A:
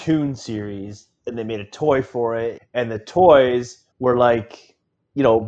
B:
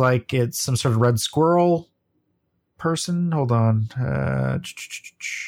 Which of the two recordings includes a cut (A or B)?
A